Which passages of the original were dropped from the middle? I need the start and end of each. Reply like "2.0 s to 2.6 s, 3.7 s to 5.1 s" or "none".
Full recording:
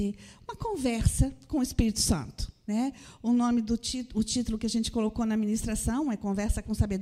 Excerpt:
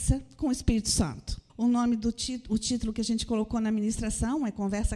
2.6 s to 3.1 s